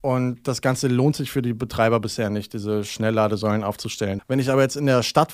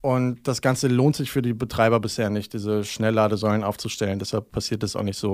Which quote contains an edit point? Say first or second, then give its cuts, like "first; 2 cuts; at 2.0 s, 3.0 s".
first; 1 cut; at 4.2 s